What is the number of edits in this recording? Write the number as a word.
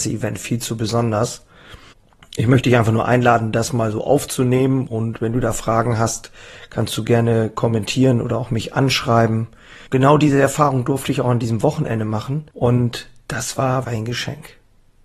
three